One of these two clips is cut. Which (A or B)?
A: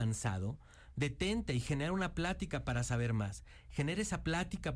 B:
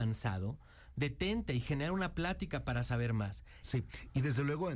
B